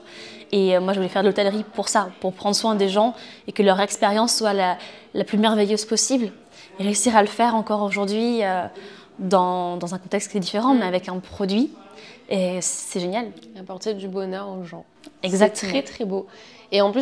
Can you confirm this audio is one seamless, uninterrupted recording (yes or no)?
yes